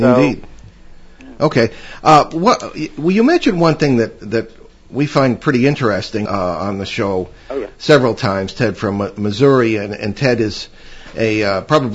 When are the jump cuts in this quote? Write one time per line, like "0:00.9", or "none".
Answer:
0:06.3